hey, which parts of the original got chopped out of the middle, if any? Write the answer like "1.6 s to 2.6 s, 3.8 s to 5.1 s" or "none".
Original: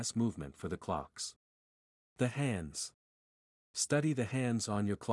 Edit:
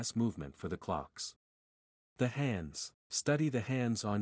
3.0 s to 3.6 s